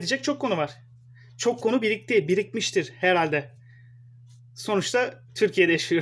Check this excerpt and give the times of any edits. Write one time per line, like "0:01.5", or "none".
none